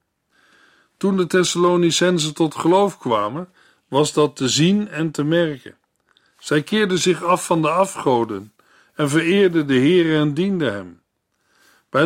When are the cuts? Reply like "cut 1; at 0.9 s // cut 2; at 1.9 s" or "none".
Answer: none